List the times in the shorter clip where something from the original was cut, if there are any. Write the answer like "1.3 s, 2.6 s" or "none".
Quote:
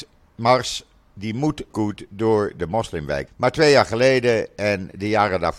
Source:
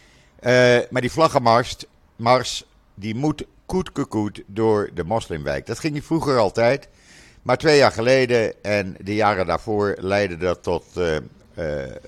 1.7 s, 3.3 s